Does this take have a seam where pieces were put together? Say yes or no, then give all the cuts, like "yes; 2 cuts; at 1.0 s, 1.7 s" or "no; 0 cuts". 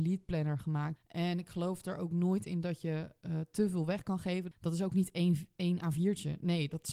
yes; 2 cuts; at 1.0 s, 4.5 s